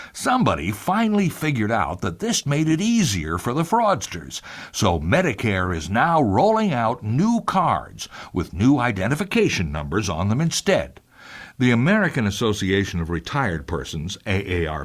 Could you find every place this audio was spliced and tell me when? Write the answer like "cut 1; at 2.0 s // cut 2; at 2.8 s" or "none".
cut 1; at 2.4 s

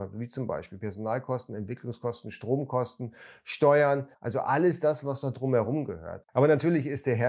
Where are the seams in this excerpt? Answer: cut 1; at 4.1 s // cut 2; at 6.2 s

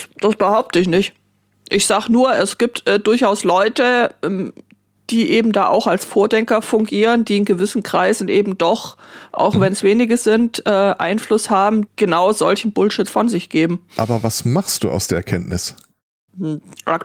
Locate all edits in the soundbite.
cut 1; at 11.9 s

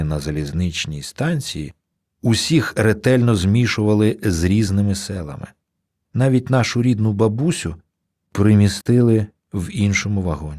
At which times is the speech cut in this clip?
none

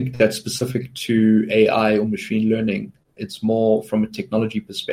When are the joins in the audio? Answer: none

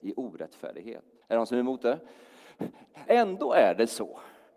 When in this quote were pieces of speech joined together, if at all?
cut 1; at 1.2 s // cut 2; at 3.1 s

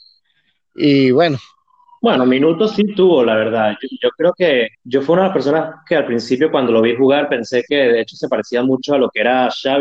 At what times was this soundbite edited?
cut 1; at 4.7 s

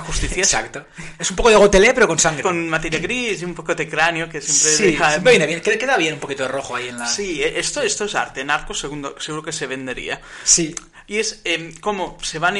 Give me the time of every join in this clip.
cut 1; at 2.4 s

